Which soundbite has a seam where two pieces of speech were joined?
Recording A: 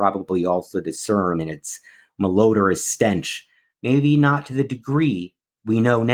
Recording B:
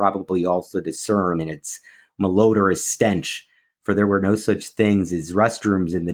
A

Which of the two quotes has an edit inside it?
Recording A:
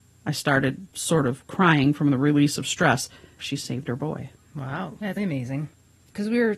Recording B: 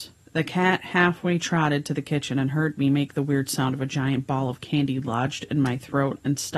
A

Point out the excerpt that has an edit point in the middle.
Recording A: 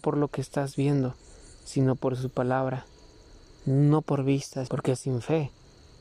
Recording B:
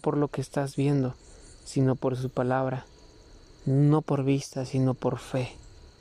A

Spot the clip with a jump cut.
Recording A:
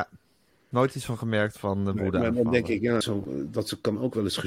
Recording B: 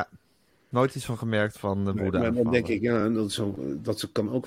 A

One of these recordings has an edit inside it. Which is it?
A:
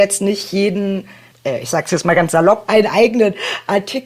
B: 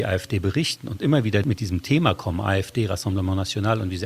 A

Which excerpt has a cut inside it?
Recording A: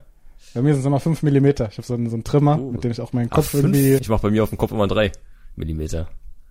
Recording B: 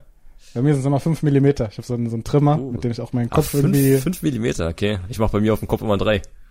A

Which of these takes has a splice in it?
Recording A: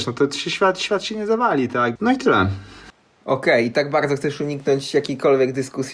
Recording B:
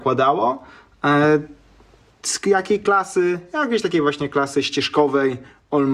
A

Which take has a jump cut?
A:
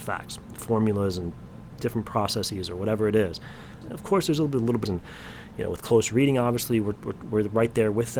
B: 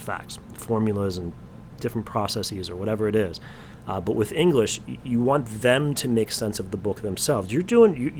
A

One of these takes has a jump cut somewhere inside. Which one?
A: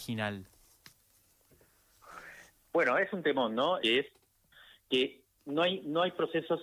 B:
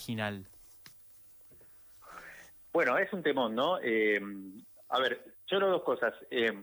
A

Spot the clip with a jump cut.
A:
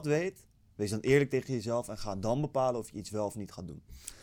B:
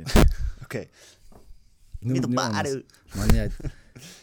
B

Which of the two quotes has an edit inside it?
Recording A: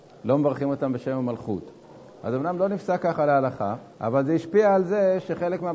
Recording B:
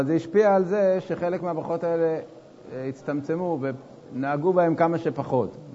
A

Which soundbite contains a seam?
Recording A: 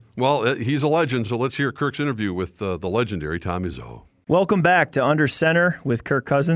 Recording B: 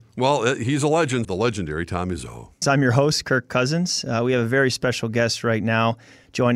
B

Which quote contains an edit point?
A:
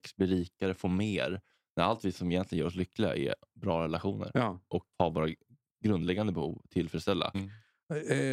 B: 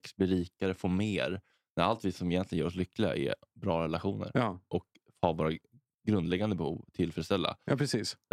A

